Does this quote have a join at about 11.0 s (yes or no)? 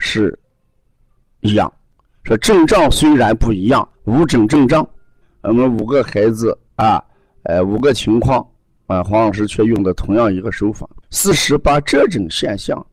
yes